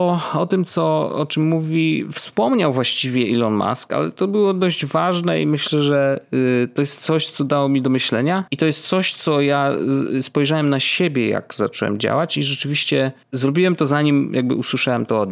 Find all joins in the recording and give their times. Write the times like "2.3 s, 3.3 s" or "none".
8.5 s, 13.2 s